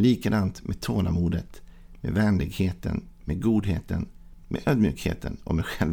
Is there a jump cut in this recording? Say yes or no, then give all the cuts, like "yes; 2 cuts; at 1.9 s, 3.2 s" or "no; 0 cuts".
yes; 1 cut; at 4.4 s